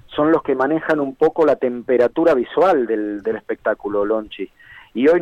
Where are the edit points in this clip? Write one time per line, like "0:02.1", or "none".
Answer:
none